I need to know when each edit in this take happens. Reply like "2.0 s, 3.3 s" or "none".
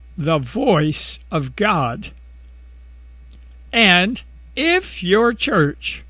none